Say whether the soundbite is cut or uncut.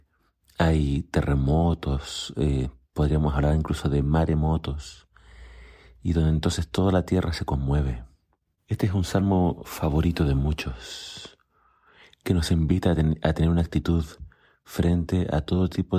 cut